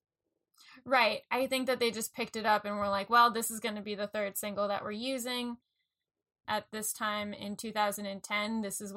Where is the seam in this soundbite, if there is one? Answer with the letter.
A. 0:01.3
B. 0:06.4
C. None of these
B